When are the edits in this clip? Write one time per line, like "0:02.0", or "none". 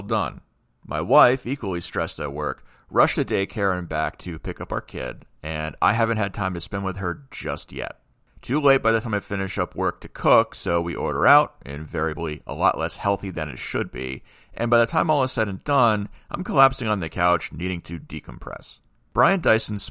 none